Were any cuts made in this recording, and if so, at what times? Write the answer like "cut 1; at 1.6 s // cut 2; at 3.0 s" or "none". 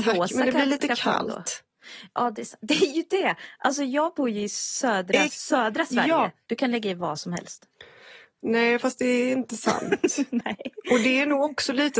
cut 1; at 5.3 s // cut 2; at 6.5 s

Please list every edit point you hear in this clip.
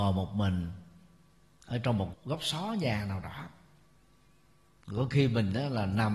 cut 1; at 2.1 s

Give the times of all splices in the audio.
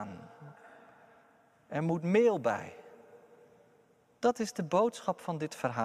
none

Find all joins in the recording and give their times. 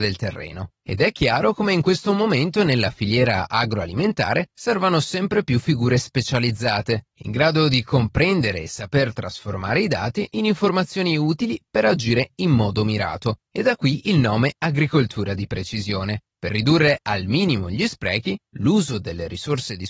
none

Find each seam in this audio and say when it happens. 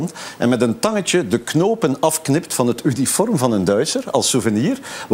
none

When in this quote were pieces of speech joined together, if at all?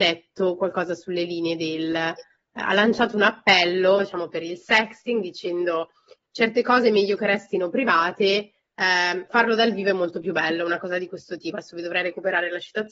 none

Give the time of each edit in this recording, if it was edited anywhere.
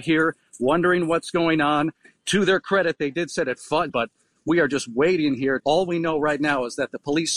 cut 1; at 3.9 s // cut 2; at 5.6 s

